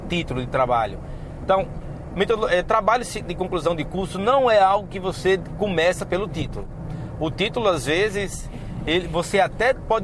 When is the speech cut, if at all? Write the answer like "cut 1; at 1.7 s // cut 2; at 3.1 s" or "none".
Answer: none